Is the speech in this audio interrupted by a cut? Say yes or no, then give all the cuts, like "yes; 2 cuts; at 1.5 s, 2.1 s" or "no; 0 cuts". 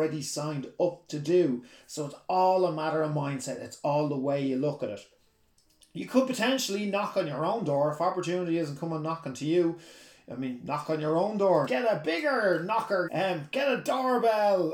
yes; 2 cuts; at 11.7 s, 13.1 s